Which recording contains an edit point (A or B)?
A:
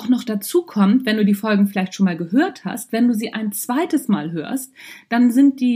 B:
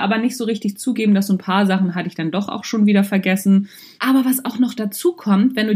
B